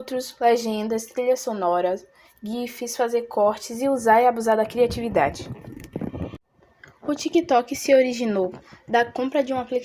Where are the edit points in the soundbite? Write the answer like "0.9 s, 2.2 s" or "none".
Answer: none